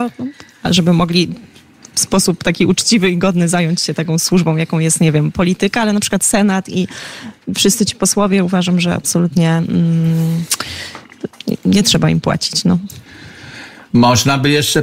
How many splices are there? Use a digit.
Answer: 0